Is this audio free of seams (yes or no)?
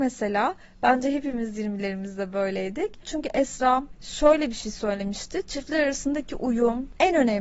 no